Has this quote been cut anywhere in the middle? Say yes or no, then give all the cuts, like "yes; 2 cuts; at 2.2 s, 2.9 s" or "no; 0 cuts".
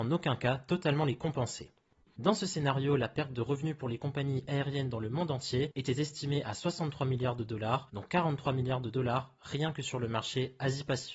yes; 1 cut; at 2.0 s